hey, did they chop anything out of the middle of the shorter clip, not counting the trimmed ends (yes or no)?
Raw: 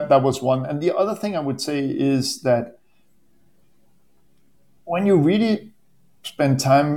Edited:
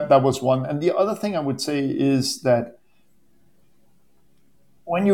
no